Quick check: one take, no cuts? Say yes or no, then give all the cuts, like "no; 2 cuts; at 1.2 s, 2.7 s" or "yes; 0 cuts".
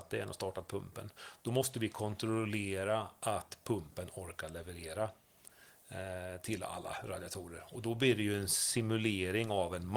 yes; 0 cuts